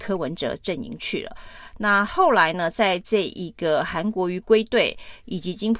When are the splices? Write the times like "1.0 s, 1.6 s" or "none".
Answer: none